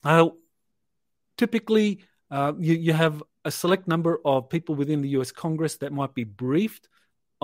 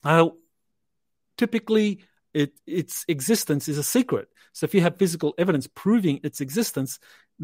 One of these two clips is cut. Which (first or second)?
second